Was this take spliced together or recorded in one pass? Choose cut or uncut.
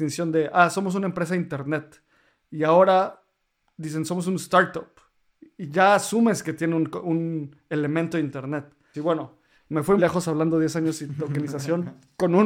cut